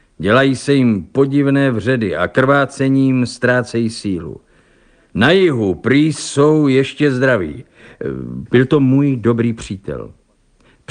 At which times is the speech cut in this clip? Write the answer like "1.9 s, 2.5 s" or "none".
8.5 s